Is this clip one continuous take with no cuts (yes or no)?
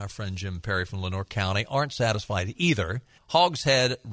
no